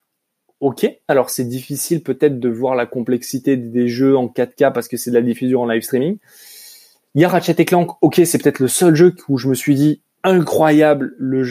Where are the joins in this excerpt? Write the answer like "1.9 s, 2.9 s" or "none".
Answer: 1.1 s